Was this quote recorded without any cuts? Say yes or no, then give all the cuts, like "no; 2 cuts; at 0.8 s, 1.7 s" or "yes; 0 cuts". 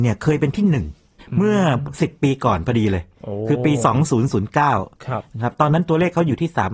yes; 0 cuts